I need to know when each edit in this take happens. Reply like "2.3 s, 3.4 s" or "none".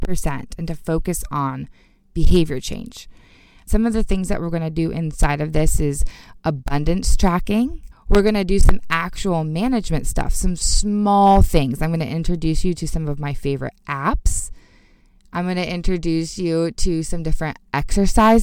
3.7 s